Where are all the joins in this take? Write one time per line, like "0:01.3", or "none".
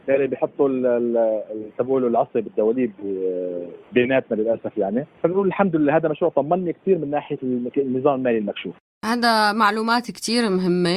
0:03.8
0:05.2